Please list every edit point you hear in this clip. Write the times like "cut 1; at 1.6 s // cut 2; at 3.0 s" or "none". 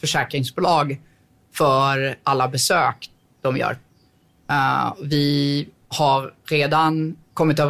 none